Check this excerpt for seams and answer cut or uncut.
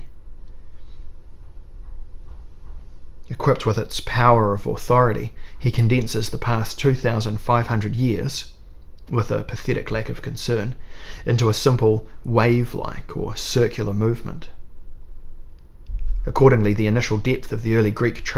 uncut